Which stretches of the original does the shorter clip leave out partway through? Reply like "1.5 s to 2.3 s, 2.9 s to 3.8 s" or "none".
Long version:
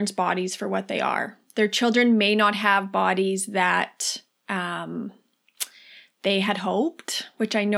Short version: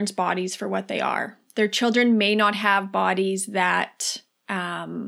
none